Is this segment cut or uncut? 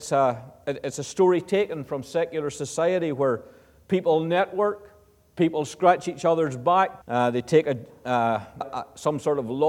cut